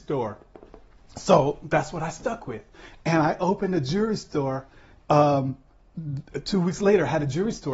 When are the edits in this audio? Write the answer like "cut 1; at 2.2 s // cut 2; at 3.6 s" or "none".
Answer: none

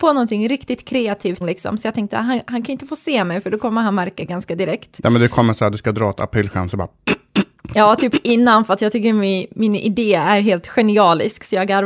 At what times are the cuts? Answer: cut 1; at 1.4 s

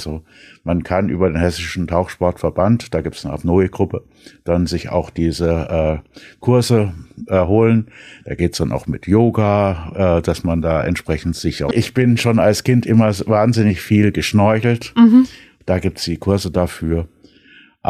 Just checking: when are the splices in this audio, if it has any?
cut 1; at 11.7 s // cut 2; at 15.6 s

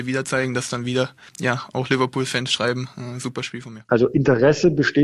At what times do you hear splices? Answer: cut 1; at 1.3 s // cut 2; at 3.9 s

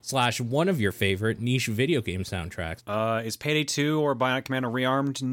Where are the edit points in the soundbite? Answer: cut 1; at 2.8 s

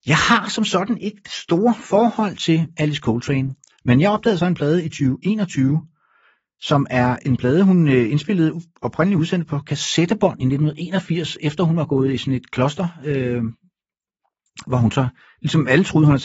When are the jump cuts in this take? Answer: none

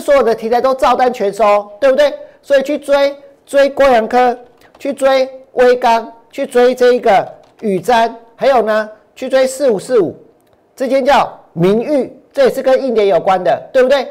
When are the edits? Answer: none

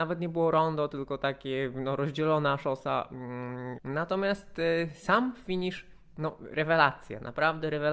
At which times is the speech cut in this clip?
cut 1; at 3.7 s

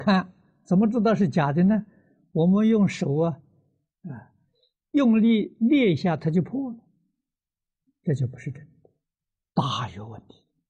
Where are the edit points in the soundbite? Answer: cut 1; at 9.5 s

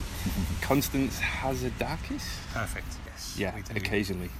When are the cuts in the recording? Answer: cut 1; at 3.1 s

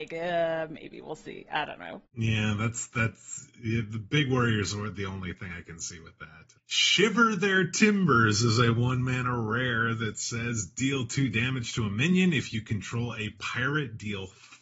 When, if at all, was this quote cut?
cut 1; at 2.1 s // cut 2; at 6.6 s

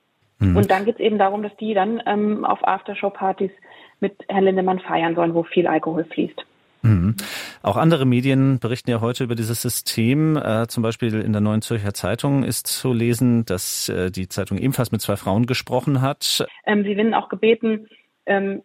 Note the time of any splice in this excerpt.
cut 1; at 16.5 s

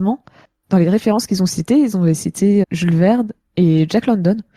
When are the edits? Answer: cut 1; at 2.6 s

